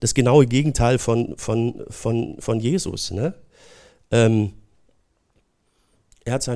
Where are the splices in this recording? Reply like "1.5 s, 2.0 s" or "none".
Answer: none

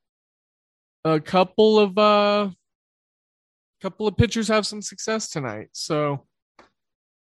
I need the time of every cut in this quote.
none

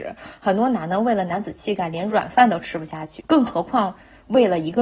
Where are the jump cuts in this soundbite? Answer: 3.2 s

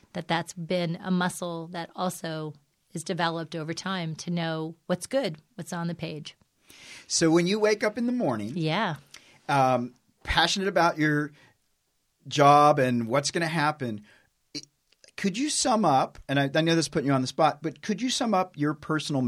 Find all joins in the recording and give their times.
none

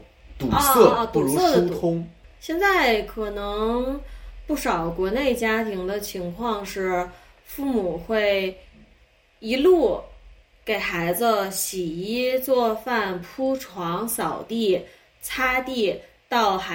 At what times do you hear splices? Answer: none

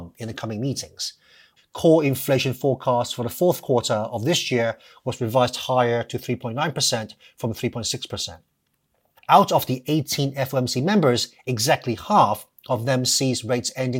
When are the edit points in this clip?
1.6 s, 9.2 s

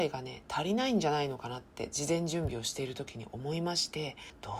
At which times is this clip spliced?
none

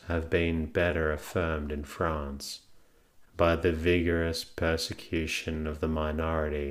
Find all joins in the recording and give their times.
3.2 s

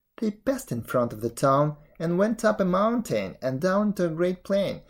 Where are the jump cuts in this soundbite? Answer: 3.6 s

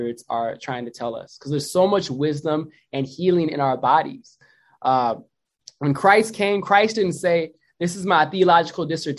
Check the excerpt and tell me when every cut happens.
none

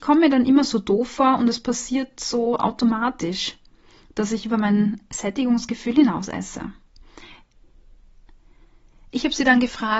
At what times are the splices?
none

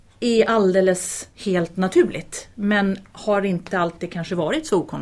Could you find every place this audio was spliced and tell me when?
none

